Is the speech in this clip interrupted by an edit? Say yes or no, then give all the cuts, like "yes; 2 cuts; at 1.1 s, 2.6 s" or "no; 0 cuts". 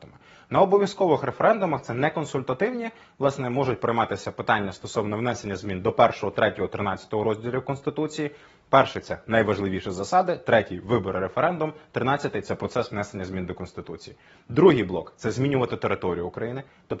no; 0 cuts